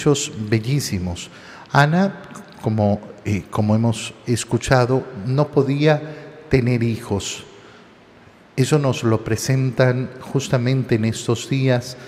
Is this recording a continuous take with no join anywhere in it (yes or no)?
yes